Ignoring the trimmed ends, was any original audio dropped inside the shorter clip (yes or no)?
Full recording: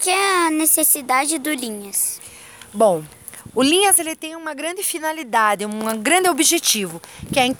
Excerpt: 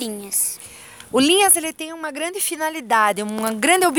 yes